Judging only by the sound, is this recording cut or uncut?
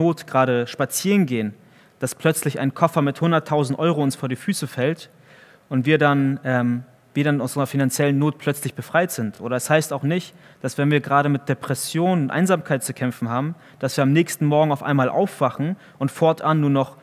uncut